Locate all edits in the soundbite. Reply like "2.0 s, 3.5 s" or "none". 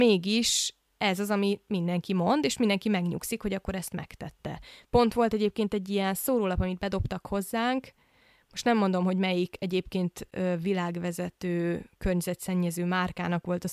4.8 s